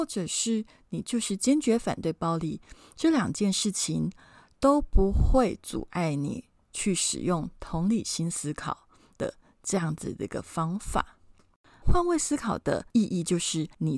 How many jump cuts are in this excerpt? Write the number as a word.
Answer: one